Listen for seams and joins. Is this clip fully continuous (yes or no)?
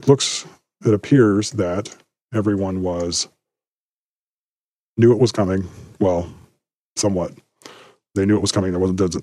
yes